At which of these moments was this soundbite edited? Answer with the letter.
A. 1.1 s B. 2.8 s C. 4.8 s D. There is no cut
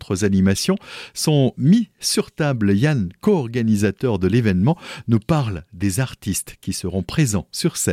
D